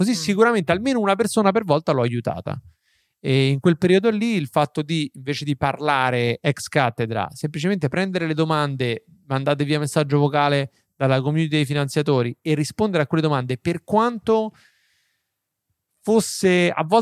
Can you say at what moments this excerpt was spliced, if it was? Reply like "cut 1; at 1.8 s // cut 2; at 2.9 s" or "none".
none